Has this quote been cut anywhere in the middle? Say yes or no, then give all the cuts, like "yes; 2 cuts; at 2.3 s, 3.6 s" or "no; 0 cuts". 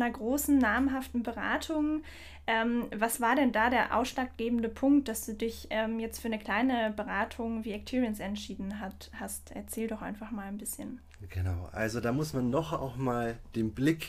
no; 0 cuts